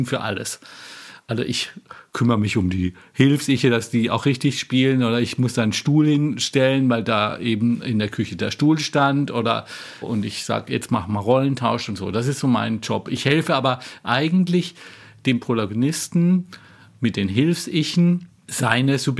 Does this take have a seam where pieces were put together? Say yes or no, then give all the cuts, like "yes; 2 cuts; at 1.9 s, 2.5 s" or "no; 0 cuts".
yes; 1 cut; at 10.0 s